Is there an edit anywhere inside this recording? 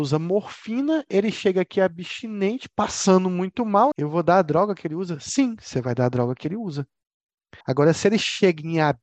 yes; 2 cuts; at 3.9 s, 7.6 s

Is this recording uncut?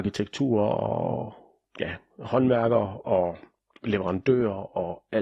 yes; 0 cuts

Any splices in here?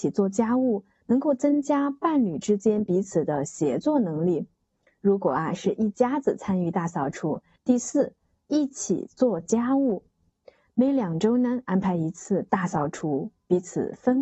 yes; 1 cut; at 7.6 s

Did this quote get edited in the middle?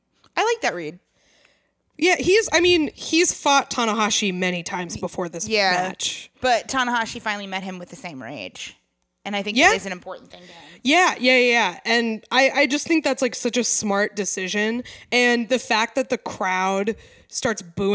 no; 0 cuts

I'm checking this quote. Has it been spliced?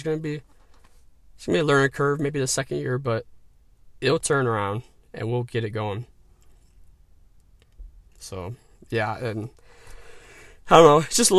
no; 0 cuts

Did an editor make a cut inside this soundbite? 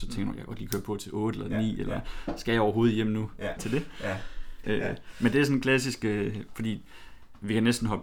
yes; 2 cuts; at 3.6 s, 4.6 s

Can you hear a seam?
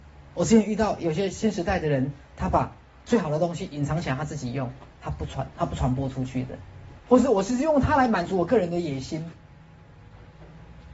yes; 1 cut; at 7.0 s

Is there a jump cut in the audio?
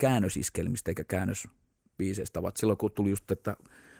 no; 0 cuts

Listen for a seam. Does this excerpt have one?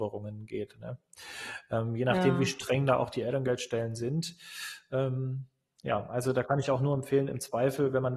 no; 0 cuts

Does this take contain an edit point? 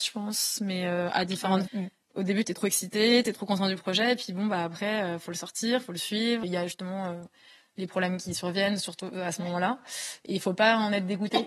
yes; 2 cuts; at 1.7 s, 6.4 s

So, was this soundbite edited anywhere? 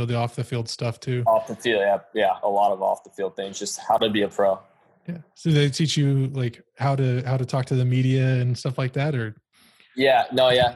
no; 0 cuts

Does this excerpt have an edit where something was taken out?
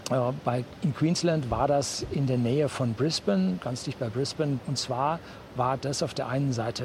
yes; 1 cut; at 4.6 s

